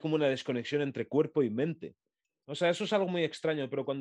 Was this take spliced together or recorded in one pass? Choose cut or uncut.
cut